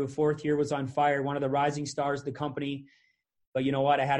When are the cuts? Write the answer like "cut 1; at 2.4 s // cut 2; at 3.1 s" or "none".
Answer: none